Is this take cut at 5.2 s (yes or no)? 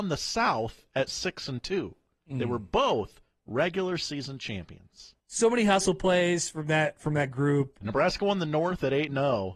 yes